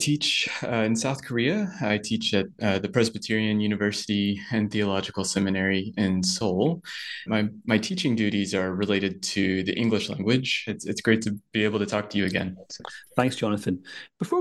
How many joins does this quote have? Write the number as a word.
two